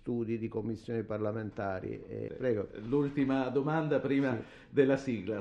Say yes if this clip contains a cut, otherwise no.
yes